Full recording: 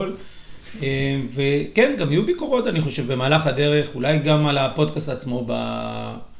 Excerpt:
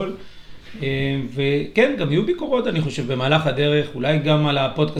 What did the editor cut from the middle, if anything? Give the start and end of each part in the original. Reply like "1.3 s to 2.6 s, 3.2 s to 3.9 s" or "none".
none